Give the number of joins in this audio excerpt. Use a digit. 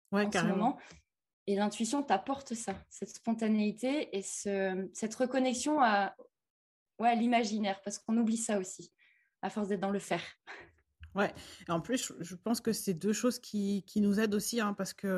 0